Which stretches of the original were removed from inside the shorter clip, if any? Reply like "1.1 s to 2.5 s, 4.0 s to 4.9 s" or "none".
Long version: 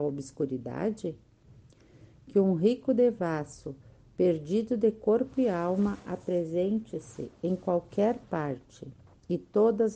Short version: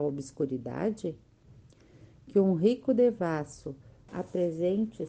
4.1 s to 6.0 s